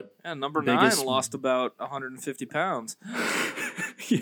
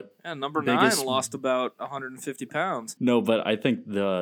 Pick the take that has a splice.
second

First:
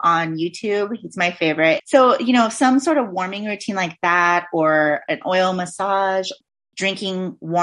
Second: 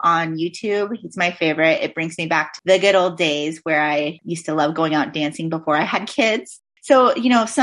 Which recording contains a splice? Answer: first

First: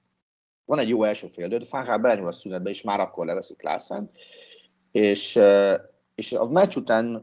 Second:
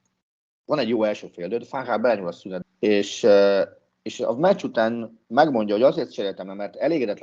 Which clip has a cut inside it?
second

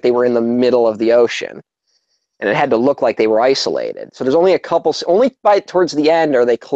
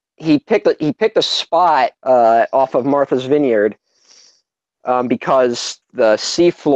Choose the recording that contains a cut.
second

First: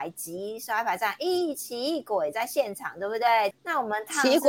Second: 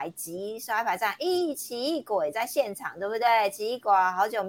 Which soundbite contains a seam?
first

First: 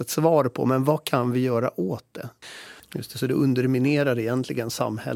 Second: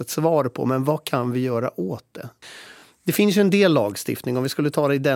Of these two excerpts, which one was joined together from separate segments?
first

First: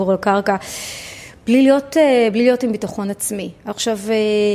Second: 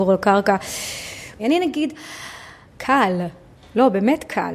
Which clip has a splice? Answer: second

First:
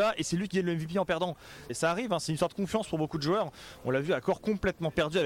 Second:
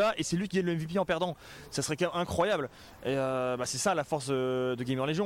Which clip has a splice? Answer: first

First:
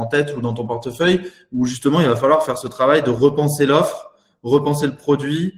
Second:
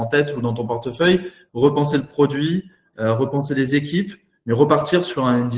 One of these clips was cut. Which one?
second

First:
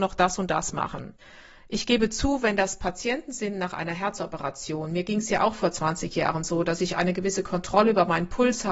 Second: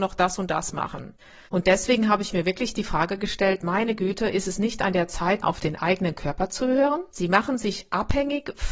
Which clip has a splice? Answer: second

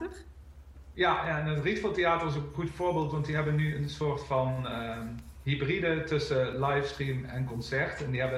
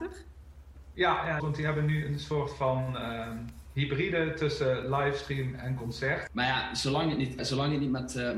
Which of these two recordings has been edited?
second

